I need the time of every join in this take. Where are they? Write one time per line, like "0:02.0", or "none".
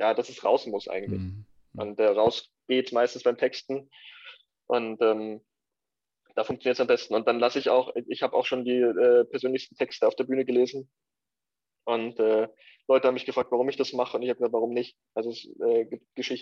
none